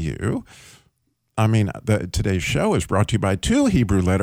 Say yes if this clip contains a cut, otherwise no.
no